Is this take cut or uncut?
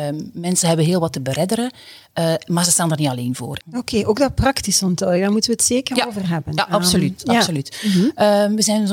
cut